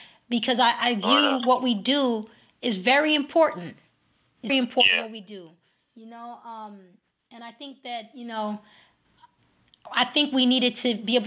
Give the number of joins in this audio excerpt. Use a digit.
1